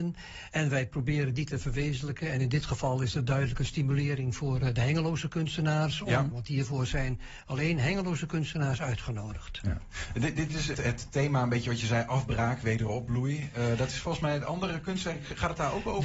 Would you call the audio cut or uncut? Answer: cut